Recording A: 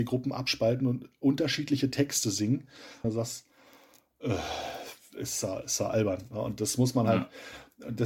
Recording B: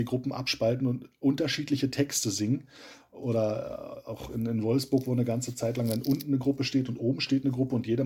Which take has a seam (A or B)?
A